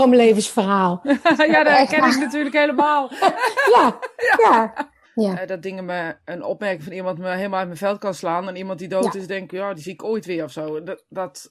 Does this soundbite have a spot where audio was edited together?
yes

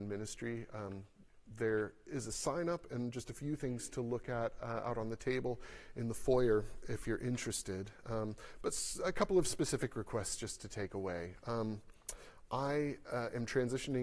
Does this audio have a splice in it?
no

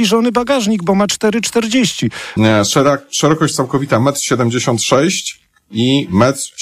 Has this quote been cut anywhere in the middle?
yes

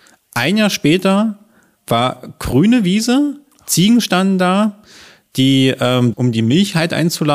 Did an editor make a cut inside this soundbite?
yes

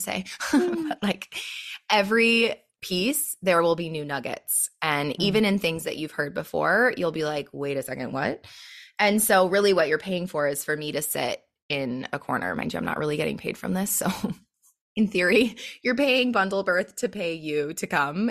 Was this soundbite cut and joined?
no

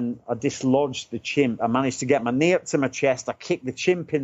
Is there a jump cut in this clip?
no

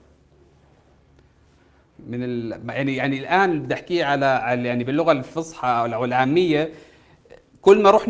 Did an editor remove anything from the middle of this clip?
no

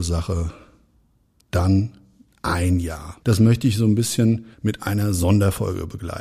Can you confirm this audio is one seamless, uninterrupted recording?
no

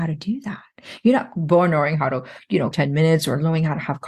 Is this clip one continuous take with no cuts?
no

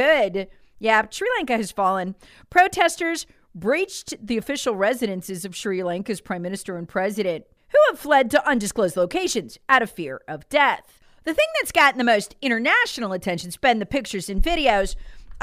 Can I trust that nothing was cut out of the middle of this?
yes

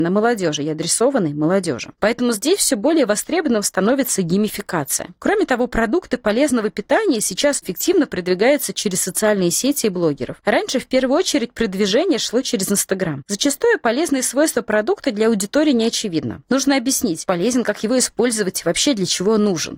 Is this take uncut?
no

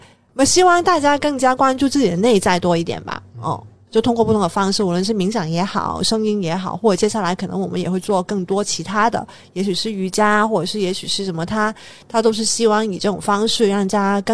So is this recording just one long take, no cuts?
yes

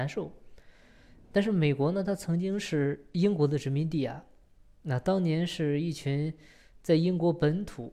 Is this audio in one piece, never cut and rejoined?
yes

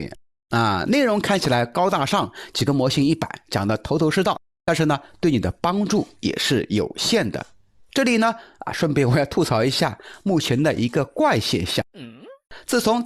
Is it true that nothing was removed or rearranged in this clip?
yes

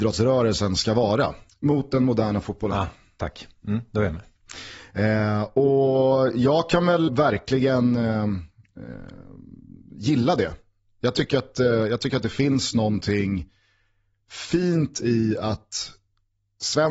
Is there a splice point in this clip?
yes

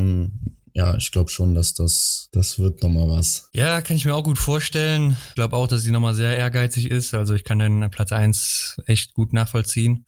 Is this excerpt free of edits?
yes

